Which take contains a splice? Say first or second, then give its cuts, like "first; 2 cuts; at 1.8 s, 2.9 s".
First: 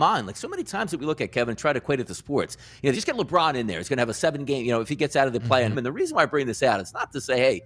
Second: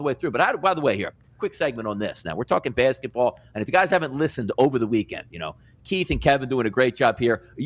first; 2 cuts; at 2.9 s, 5.7 s